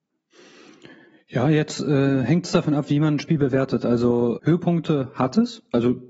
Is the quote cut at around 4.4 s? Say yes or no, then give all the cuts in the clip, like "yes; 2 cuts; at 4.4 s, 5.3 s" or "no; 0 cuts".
yes; 1 cut; at 4.4 s